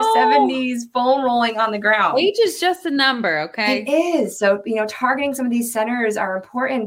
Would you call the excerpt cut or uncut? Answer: uncut